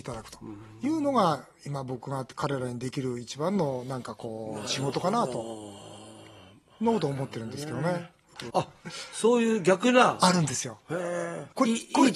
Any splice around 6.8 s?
no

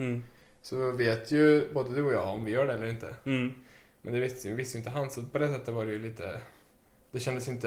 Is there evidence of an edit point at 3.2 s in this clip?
no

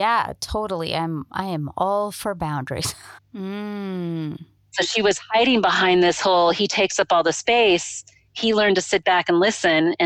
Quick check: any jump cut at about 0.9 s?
no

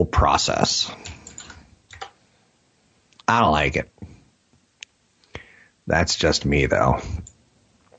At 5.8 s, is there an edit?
no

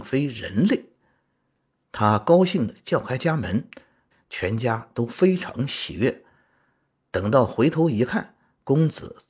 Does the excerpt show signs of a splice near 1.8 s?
no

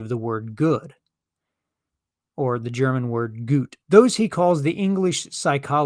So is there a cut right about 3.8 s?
yes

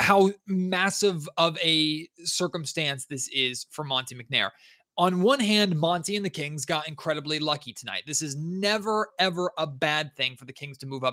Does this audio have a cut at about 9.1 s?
yes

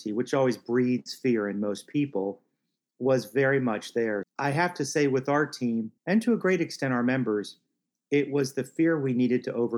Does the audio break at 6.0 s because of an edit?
yes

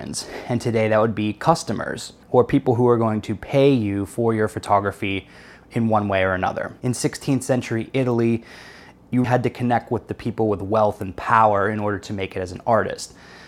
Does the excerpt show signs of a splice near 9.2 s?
yes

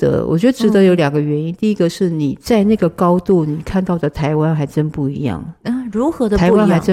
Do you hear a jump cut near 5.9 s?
no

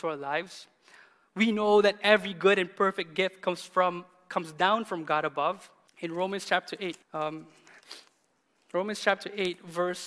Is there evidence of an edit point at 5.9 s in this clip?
yes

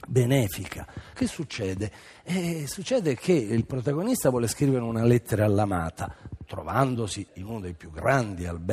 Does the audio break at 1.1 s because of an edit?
yes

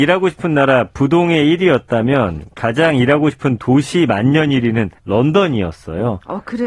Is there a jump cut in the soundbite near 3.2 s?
no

